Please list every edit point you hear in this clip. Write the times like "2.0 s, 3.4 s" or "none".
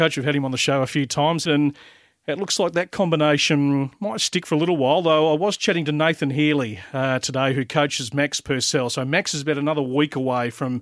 1.5 s